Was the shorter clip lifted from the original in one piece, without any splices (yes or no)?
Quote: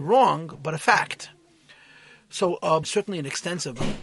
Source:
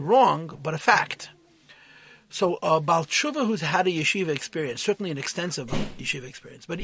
no